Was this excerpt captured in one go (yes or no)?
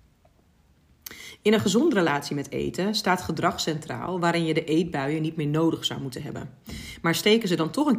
yes